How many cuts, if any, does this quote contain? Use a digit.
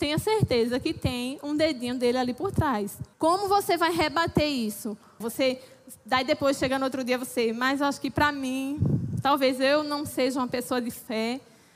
2